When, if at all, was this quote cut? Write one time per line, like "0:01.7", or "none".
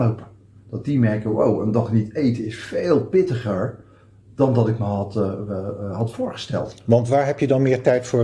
none